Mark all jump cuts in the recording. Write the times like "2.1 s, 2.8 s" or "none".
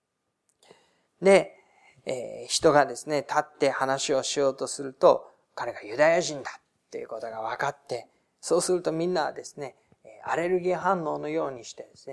1.0 s

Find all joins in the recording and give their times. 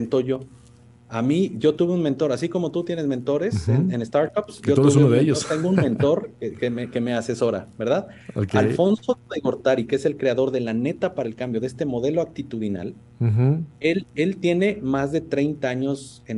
none

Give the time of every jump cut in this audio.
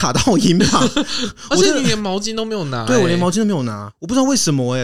3.9 s

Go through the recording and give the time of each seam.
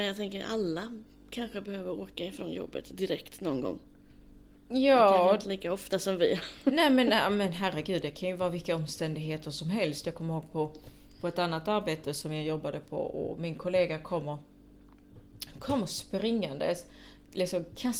4.6 s

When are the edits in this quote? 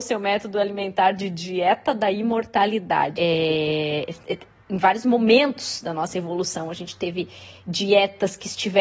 3.2 s

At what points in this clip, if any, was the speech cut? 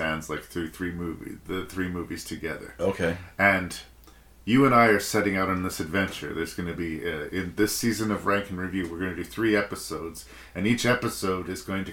none

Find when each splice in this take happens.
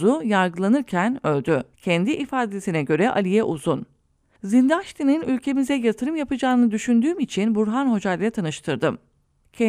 1.7 s

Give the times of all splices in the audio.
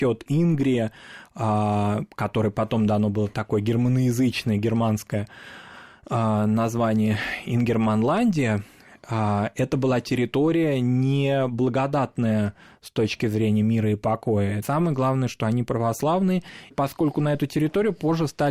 14.6 s, 16.7 s

